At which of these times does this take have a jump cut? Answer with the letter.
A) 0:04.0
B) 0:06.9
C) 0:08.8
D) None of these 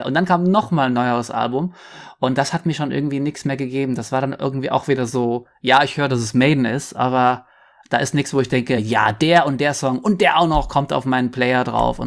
D